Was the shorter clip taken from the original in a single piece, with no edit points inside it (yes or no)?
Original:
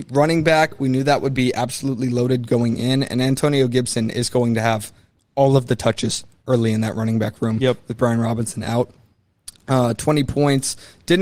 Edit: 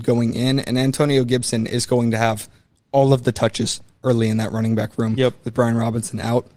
yes